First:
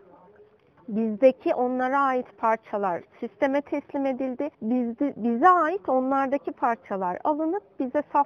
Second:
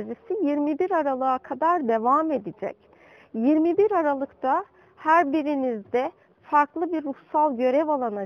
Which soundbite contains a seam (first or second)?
first